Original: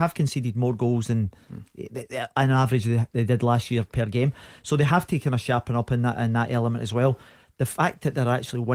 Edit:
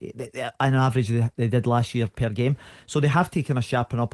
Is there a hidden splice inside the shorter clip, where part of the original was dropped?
no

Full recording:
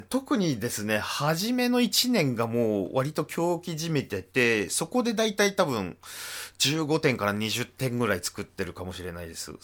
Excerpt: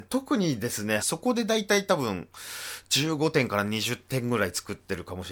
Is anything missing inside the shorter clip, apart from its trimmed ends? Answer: yes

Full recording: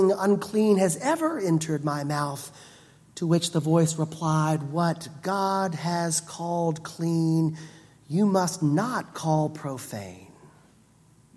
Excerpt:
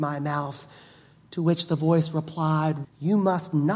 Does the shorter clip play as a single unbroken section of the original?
no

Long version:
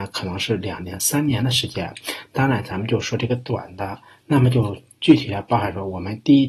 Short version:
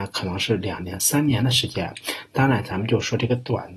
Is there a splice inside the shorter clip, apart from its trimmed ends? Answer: no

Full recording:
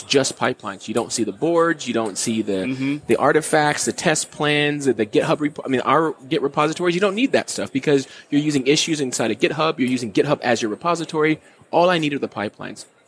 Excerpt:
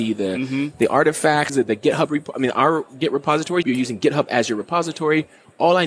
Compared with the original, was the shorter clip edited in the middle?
yes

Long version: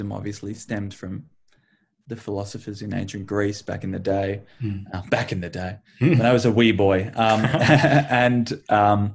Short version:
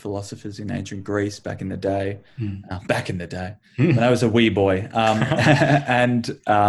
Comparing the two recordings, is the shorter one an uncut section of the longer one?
yes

